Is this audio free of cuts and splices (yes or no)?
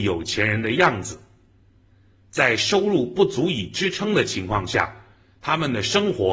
yes